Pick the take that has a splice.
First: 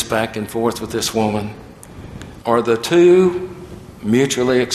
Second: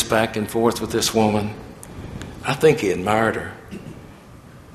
first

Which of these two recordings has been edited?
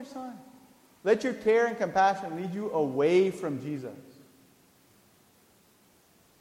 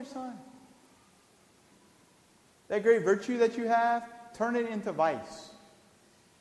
first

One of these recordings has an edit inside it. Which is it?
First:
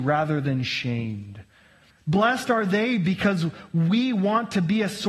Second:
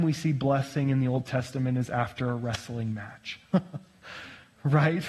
first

